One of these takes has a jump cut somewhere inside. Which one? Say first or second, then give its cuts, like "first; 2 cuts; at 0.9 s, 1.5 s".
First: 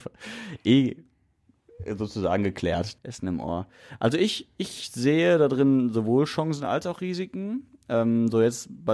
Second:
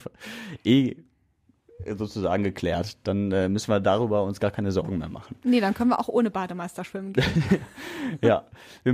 first; 1 cut; at 3.0 s